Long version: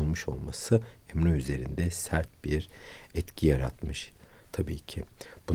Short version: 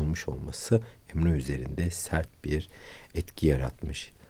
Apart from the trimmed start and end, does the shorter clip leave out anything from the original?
no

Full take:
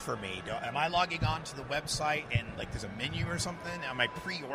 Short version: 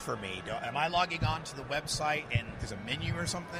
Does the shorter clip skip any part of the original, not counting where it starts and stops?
yes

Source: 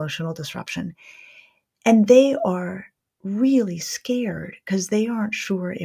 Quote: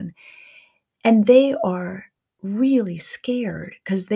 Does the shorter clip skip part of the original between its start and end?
no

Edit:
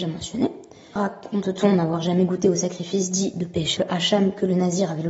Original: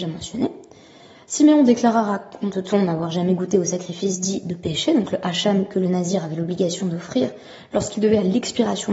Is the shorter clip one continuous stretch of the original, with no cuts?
no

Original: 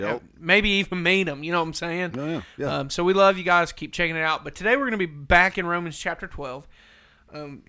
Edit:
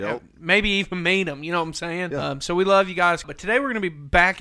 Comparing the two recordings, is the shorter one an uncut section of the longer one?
no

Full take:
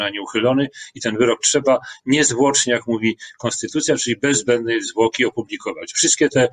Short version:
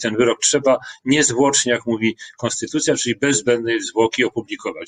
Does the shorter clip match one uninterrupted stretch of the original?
yes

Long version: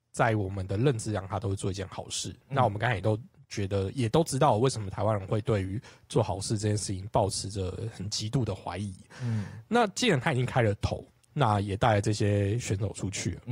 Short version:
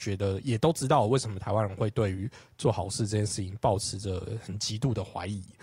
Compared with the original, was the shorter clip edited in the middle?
no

